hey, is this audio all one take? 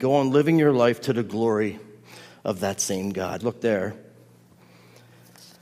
no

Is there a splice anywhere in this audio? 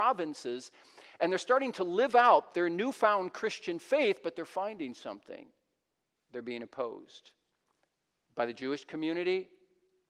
yes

